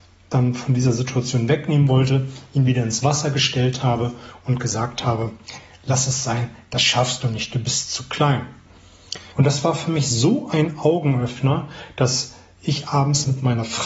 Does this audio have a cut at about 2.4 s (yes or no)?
no